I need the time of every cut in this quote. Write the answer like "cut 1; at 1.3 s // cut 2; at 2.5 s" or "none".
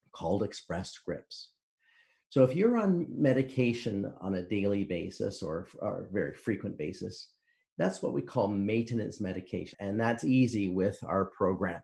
cut 1; at 9.7 s